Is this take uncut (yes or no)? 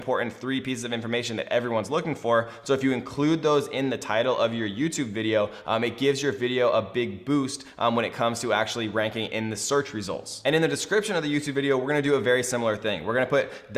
yes